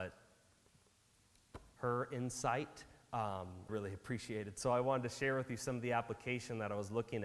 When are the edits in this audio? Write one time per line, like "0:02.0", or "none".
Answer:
0:03.7